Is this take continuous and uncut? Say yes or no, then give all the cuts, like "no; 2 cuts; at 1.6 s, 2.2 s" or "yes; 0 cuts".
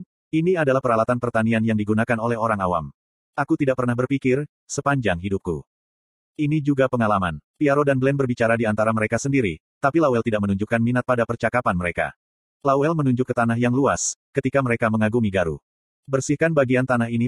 no; 2 cuts; at 4.6 s, 7.5 s